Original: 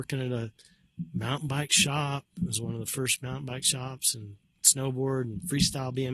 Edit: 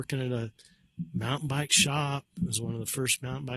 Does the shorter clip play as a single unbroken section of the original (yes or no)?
yes